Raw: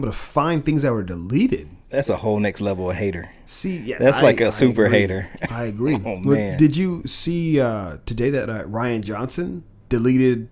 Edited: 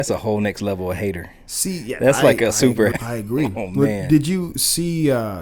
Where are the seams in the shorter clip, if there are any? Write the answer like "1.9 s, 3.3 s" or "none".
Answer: 2.9 s